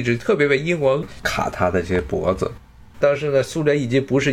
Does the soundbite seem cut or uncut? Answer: cut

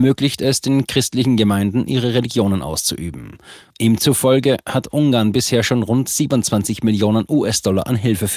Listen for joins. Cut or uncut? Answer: uncut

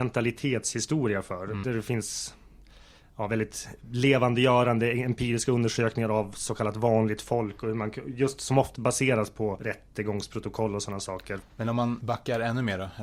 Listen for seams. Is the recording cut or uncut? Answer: cut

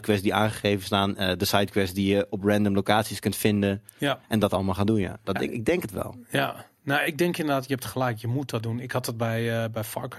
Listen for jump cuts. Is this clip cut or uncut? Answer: uncut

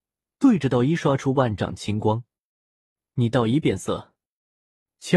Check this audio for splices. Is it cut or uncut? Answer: uncut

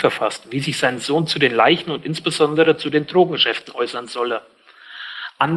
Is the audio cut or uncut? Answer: uncut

